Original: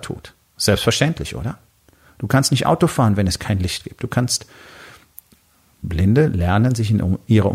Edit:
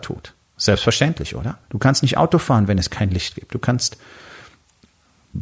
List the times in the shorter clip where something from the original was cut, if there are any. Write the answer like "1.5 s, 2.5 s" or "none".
1.6 s